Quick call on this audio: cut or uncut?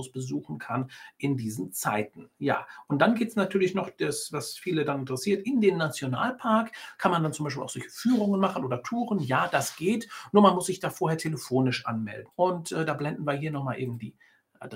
cut